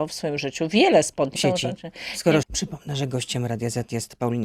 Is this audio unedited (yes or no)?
no